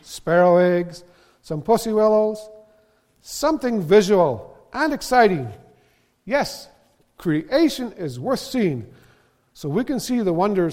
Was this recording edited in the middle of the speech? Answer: no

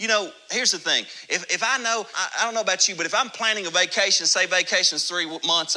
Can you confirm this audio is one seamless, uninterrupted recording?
no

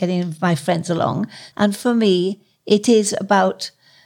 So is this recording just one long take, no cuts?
no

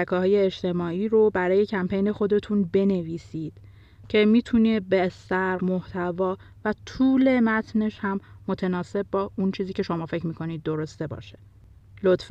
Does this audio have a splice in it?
yes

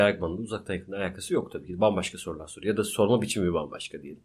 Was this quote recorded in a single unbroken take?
yes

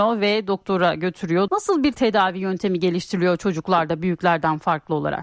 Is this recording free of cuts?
no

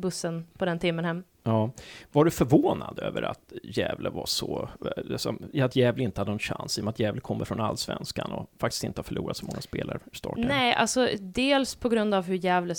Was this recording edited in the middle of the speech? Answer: no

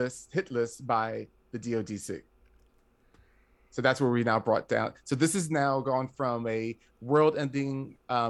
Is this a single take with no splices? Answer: yes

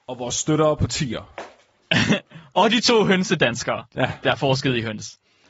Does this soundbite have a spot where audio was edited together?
yes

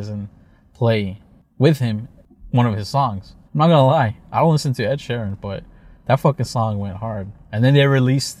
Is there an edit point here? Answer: yes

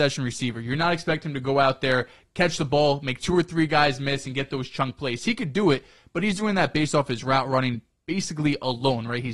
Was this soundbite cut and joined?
no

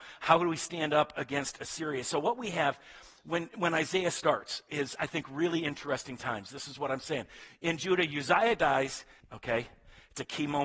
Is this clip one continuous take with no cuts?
no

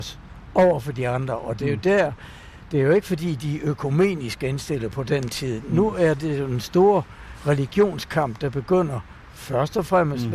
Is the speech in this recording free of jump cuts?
yes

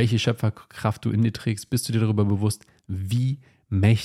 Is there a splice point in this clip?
no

